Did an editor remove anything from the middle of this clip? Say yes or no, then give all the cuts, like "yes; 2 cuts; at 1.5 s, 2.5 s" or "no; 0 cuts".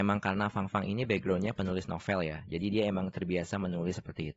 no; 0 cuts